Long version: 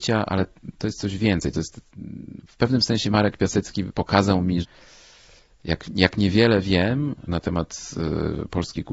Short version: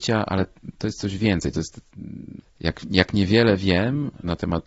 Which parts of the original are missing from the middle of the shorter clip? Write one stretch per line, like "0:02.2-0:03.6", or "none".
0:02.4-0:05.4

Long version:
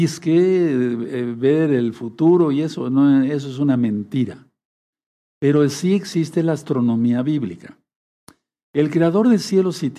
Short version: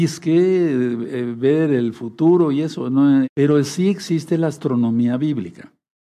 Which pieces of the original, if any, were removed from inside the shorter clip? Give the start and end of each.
0:03.2-0:05.3

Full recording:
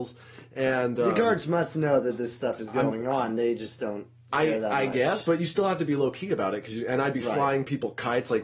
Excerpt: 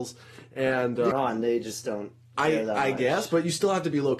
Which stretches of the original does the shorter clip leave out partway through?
0:01.1-0:03.1

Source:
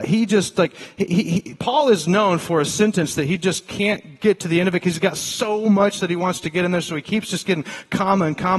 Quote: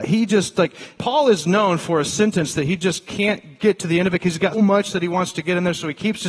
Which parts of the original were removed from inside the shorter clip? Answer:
0:01.0-0:01.6
0:05.1-0:05.6

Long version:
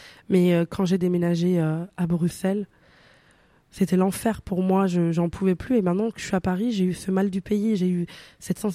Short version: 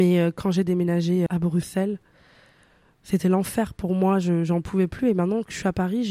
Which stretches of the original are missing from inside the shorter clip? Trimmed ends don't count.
0:01.6-0:01.9

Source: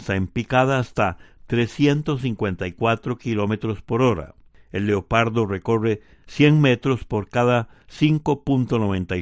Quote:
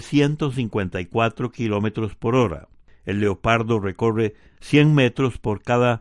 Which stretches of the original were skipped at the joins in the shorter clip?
none

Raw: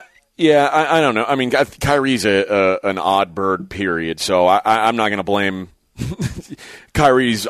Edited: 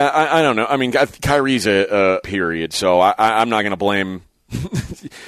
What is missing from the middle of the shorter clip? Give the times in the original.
0:02.8-0:03.7

